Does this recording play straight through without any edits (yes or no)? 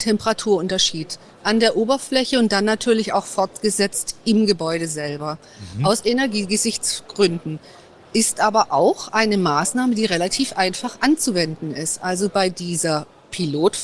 yes